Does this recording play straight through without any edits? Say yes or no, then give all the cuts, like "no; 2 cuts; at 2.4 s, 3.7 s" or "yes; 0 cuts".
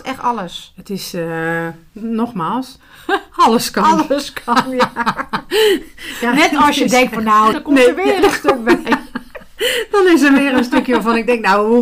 no; 1 cut; at 7.5 s